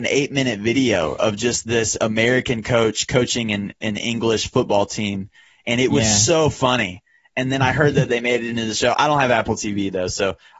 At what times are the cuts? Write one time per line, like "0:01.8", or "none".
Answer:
none